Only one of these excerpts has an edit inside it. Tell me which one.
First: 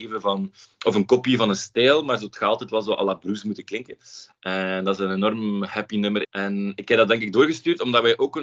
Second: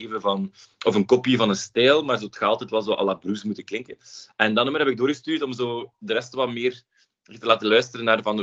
first; 2 cuts; at 4.3 s, 6.2 s

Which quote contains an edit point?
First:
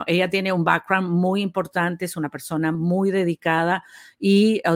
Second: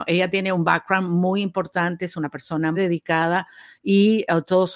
second; 1 cut; at 2.7 s

